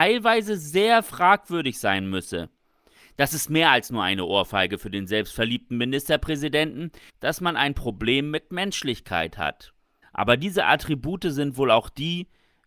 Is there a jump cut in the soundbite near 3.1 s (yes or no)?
no